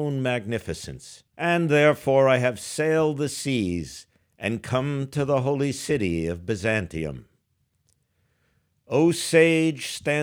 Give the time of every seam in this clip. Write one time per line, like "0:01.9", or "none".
0:01.3